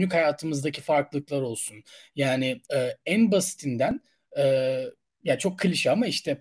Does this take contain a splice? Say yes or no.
yes